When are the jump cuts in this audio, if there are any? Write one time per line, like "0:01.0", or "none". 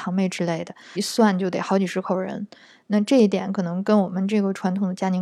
0:01.0